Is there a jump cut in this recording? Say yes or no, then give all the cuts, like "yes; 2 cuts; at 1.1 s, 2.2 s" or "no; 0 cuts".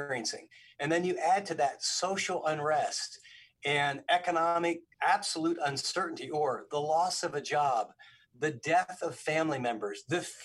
yes; 1 cut; at 4.9 s